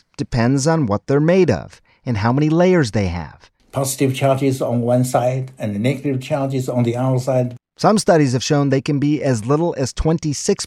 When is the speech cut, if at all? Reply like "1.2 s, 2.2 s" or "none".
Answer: 3.6 s, 7.6 s